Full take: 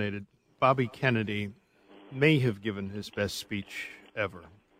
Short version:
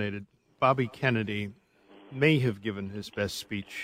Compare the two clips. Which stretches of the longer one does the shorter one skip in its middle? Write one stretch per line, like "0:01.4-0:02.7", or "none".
none